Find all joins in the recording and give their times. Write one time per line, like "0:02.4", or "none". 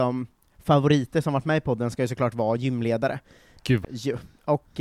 0:03.8